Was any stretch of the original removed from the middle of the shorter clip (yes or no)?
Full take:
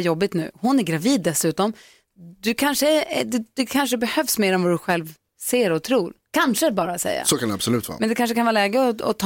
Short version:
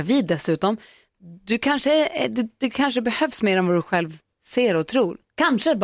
no